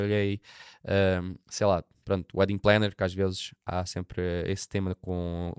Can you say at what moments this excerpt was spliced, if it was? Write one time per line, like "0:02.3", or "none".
0:01.4